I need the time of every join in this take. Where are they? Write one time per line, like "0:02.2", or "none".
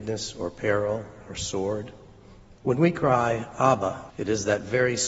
0:02.5
0:04.1

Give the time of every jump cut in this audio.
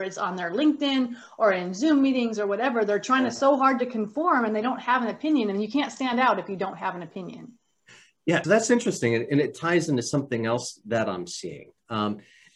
0:08.4

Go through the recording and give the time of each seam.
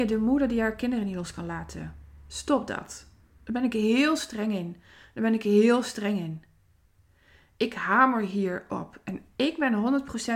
none

